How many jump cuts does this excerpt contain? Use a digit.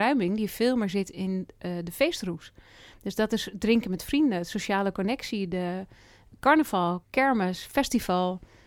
0